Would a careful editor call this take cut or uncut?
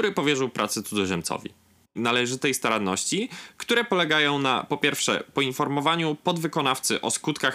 cut